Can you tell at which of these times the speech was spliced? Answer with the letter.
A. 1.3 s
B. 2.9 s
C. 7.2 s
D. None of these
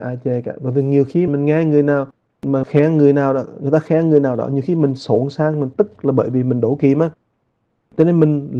A